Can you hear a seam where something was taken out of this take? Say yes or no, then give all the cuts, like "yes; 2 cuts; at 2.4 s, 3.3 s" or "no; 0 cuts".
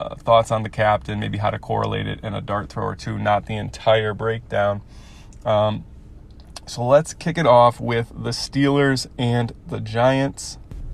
no; 0 cuts